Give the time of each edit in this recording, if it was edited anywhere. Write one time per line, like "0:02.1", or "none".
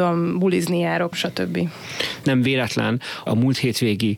0:01.1
0:02.2
0:03.3